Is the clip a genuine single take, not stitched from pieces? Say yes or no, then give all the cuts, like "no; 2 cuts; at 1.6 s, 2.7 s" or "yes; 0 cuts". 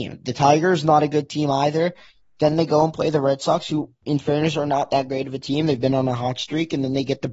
yes; 0 cuts